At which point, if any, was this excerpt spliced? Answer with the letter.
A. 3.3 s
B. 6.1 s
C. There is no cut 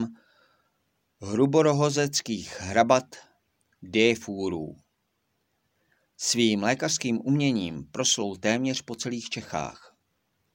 C